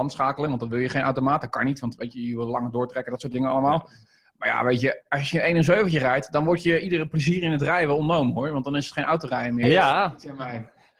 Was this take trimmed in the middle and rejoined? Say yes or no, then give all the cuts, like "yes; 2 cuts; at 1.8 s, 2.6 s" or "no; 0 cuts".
yes; 1 cut; at 9.6 s